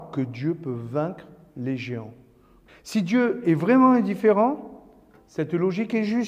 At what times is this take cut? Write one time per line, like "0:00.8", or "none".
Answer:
0:02.7